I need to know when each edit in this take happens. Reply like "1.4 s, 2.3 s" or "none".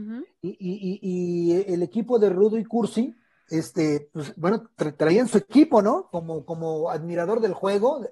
6.1 s